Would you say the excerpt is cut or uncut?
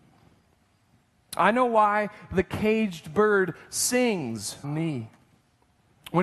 cut